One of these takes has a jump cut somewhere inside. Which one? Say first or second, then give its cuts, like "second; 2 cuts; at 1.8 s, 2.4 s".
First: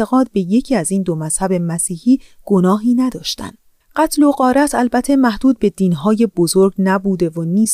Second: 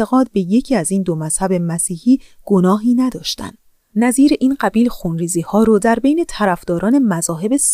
first; 1 cut; at 3.8 s